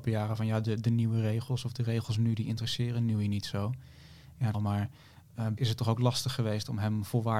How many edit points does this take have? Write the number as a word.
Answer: two